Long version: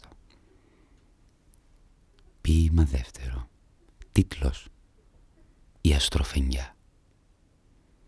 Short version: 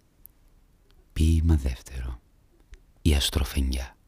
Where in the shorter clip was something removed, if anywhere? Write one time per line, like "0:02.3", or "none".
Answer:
0:02.8